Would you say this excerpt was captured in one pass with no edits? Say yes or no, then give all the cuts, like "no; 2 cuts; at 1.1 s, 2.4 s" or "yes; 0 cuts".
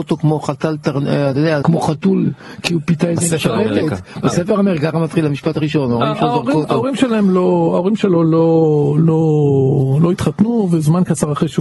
no; 1 cut; at 1.6 s